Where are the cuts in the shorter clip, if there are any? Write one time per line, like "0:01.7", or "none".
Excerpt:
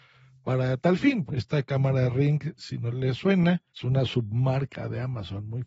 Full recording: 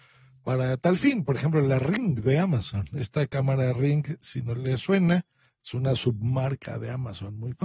0:01.3
0:03.7